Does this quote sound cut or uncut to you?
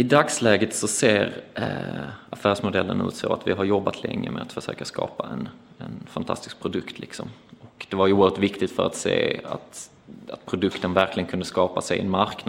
uncut